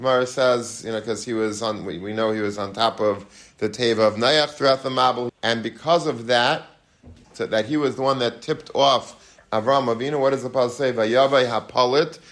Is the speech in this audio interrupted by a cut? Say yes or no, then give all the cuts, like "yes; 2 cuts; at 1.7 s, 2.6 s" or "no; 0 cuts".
yes; 2 cuts; at 5.3 s, 7.2 s